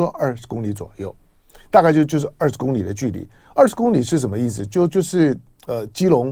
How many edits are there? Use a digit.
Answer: 0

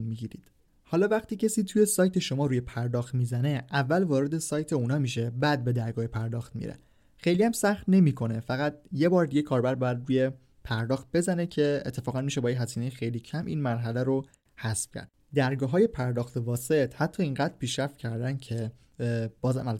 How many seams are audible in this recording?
0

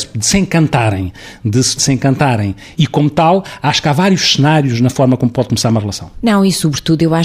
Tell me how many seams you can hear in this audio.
2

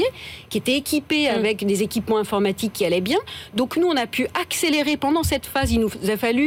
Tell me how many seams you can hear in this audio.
0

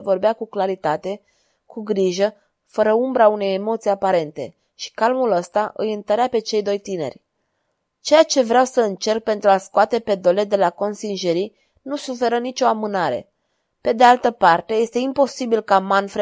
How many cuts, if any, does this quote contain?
1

